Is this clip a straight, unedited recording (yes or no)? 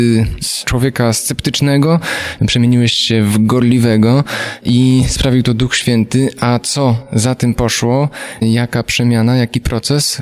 no